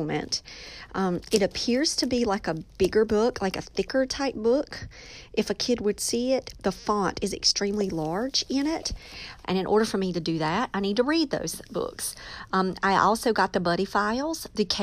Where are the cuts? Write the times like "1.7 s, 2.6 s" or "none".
9.4 s